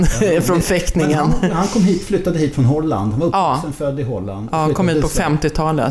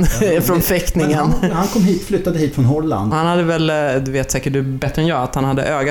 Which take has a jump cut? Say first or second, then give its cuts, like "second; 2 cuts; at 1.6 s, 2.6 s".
second; 1 cut; at 3.1 s